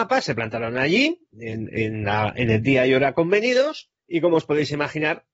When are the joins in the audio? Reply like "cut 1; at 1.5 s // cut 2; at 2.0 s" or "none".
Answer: cut 1; at 4.0 s

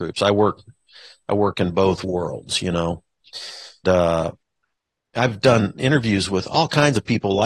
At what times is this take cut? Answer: cut 1; at 3.8 s

